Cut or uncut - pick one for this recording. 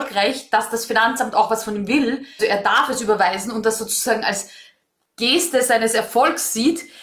cut